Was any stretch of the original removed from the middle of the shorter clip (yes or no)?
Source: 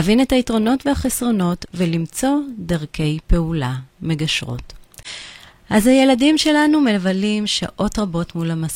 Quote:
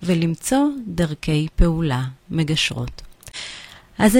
no